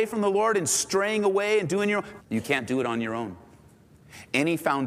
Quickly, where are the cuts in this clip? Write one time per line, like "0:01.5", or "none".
0:02.2